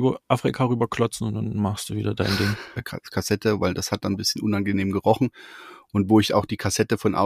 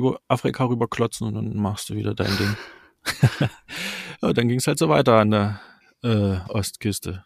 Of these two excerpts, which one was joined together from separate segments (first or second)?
first